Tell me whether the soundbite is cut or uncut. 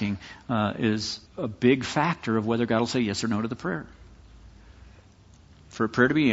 cut